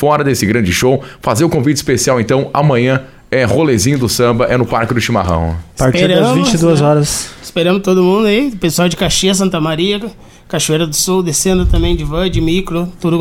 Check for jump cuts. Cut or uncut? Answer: uncut